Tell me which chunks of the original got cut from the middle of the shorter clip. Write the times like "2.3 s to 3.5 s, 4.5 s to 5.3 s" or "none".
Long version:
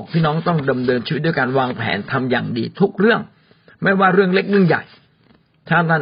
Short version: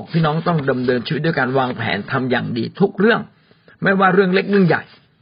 none